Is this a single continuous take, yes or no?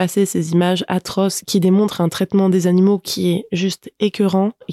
yes